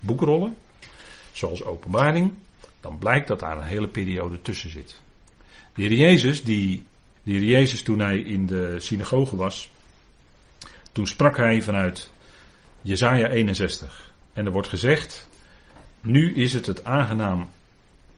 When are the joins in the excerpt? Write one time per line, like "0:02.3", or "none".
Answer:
0:07.2

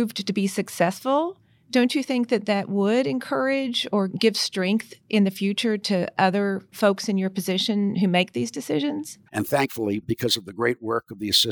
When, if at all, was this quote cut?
0:09.3

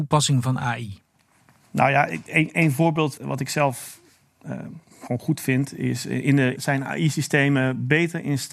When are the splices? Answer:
0:03.2
0:06.6

